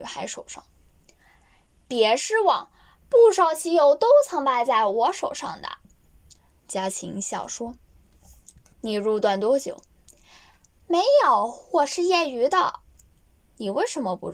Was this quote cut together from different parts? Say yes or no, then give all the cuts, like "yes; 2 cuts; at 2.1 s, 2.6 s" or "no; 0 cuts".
yes; 1 cut; at 13.0 s